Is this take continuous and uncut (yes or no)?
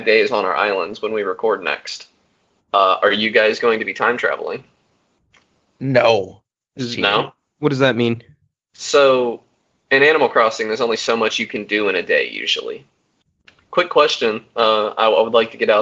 no